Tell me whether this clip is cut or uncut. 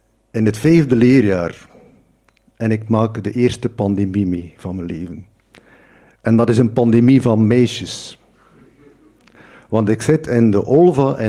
uncut